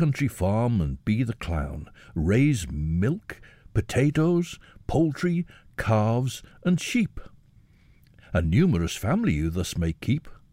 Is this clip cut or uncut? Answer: uncut